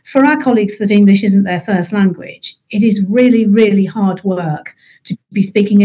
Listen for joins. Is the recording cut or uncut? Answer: uncut